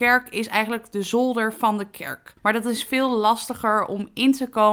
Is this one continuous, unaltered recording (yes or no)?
no